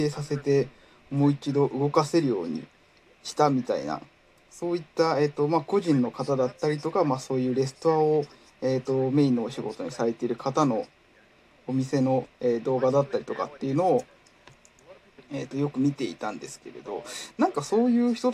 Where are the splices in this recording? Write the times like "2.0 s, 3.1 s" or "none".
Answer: none